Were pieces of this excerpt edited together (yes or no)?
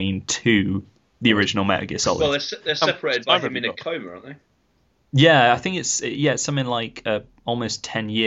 no